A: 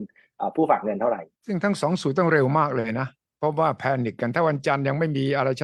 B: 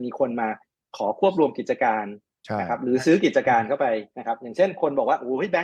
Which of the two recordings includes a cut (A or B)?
A